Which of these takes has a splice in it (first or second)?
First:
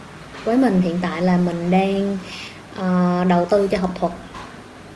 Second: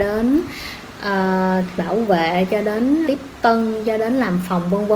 second